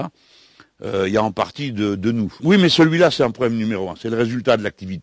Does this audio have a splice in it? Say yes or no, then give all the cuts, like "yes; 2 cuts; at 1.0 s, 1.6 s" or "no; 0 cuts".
yes; 1 cut; at 2.4 s